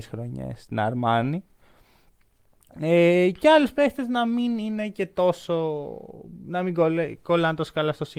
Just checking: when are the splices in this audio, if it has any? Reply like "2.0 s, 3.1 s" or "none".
none

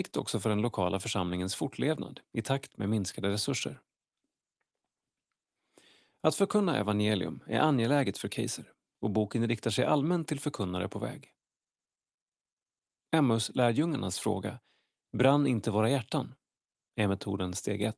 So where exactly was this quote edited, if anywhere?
none

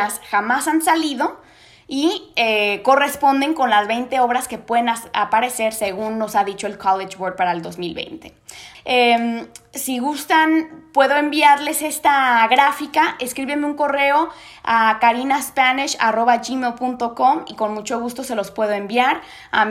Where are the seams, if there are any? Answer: 8.7 s

